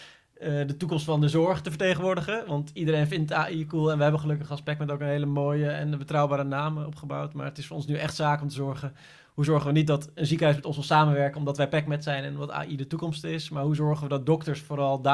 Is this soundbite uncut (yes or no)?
yes